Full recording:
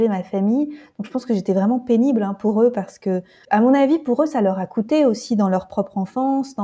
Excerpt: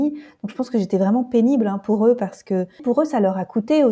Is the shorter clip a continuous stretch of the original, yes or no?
no